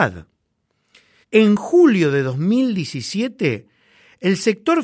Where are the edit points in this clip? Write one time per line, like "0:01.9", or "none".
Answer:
0:01.2